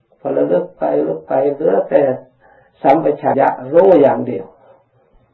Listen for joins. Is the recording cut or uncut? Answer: cut